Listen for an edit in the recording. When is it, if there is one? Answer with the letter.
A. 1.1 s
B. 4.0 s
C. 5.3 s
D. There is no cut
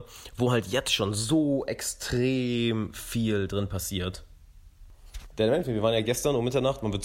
C